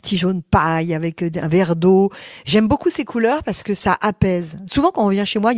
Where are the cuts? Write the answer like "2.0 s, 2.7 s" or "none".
none